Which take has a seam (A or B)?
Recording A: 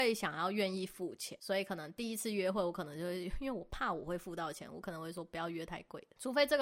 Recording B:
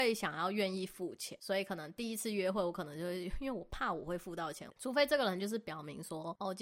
B